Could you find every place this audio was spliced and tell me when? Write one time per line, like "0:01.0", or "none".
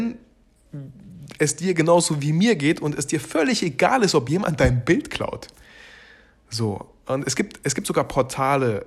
none